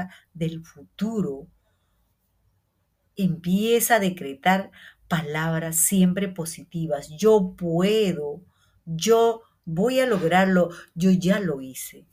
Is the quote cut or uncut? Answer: uncut